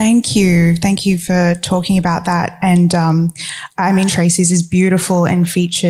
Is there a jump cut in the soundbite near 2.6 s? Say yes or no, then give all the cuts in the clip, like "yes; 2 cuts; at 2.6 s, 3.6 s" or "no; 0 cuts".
no; 1 cut; at 4.1 s